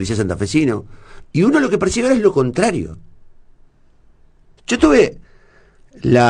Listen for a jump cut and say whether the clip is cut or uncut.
cut